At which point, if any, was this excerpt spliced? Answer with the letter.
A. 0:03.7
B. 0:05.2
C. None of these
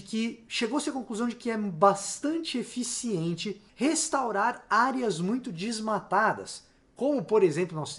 A